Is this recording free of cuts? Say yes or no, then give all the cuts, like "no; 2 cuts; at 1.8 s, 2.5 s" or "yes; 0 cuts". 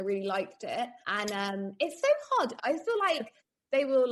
no; 2 cuts; at 1.0 s, 2.6 s